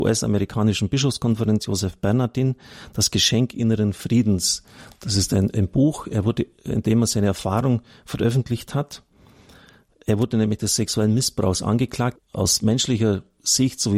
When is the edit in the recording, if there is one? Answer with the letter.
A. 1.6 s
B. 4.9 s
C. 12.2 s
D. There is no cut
C